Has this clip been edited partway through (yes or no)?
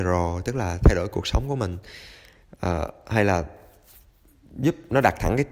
no